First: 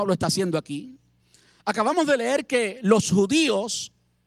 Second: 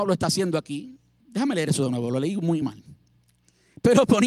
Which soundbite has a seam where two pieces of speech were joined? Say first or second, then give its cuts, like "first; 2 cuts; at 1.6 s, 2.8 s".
second; 2 cuts; at 1.2 s, 2.6 s